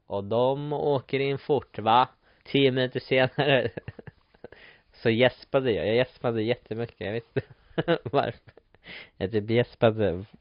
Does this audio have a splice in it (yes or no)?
yes